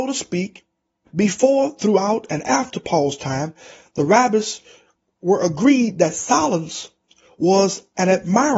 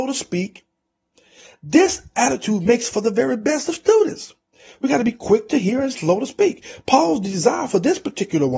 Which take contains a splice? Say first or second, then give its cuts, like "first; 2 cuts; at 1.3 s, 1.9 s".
first; 1 cut; at 1.1 s